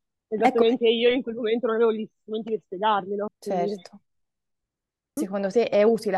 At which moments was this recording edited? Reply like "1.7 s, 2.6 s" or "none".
3.3 s, 5.2 s